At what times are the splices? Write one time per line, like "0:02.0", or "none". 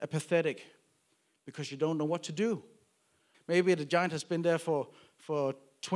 0:03.3